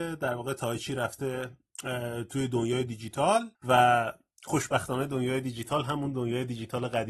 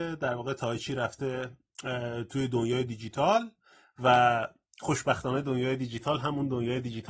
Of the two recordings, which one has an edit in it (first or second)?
first